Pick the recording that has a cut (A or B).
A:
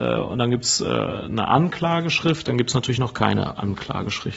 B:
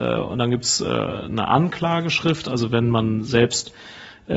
A